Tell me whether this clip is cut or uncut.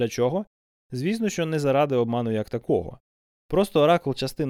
uncut